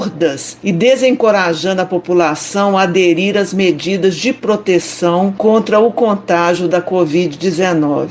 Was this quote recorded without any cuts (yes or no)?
yes